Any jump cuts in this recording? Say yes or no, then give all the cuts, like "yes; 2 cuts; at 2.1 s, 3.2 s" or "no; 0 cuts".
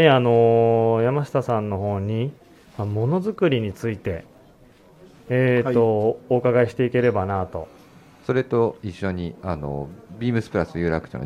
no; 0 cuts